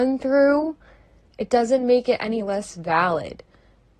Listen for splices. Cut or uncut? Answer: cut